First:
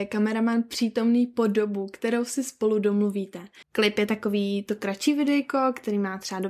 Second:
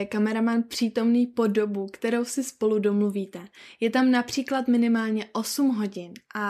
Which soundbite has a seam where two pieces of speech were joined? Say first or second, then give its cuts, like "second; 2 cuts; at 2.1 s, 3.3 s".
first; 1 cut; at 3.6 s